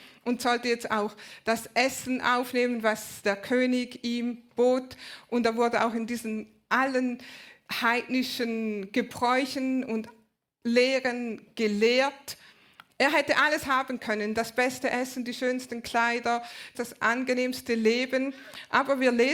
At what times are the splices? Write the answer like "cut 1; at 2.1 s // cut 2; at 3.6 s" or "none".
cut 1; at 12.9 s // cut 2; at 16.7 s